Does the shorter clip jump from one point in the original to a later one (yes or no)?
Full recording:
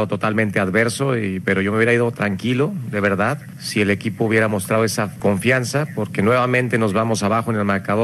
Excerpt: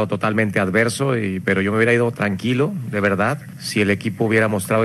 no